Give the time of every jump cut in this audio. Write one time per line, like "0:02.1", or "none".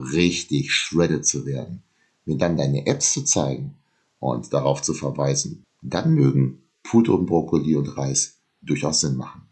0:05.6